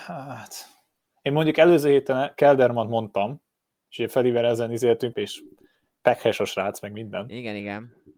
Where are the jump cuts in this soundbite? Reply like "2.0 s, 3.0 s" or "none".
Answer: 5.1 s